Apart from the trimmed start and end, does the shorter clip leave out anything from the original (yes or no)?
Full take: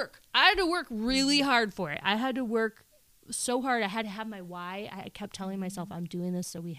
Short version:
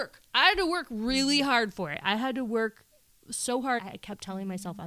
yes